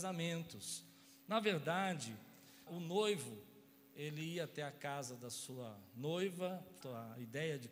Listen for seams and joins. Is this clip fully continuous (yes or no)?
no